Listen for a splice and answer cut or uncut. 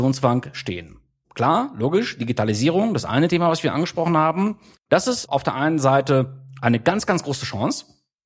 cut